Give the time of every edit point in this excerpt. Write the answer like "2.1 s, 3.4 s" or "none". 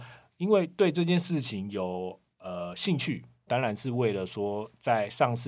3.5 s